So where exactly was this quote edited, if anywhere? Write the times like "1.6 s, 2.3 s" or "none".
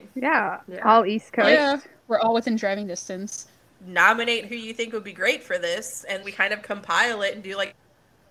3.7 s, 6.2 s